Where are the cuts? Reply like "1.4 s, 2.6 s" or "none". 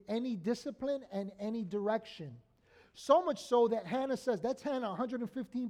none